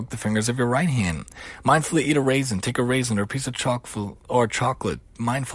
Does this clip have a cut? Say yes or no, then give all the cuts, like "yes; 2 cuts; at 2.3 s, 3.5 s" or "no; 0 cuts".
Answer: no; 0 cuts